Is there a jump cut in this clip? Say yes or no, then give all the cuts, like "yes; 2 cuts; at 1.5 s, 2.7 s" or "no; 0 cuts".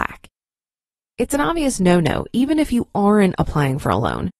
no; 0 cuts